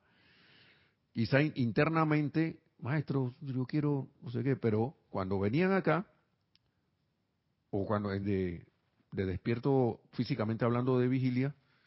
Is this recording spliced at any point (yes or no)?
yes